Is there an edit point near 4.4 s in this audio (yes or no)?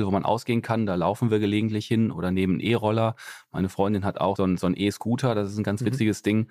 yes